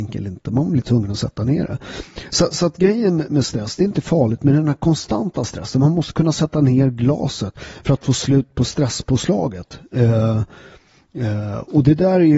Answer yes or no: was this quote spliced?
no